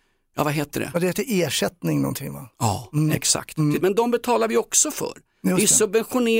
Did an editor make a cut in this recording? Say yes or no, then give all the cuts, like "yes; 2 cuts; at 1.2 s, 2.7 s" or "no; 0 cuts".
yes; 1 cut; at 3.8 s